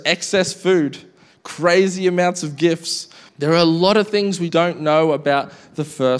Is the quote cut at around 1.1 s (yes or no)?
no